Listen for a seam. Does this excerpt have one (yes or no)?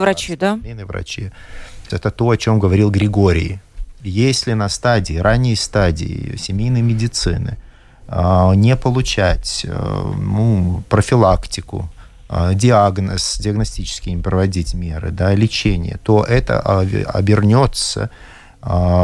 yes